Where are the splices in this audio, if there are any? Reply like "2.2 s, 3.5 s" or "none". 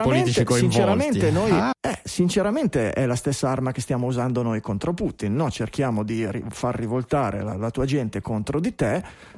1.7 s